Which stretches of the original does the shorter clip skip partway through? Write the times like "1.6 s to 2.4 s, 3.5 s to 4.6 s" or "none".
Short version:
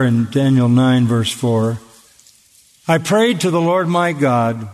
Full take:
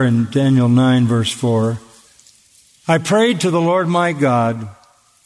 none